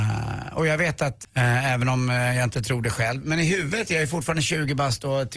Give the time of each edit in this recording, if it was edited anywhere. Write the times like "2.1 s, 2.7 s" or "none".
1.2 s